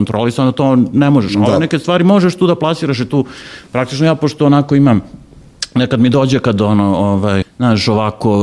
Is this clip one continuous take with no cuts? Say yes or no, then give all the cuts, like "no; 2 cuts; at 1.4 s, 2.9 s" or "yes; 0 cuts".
no; 1 cut; at 7.4 s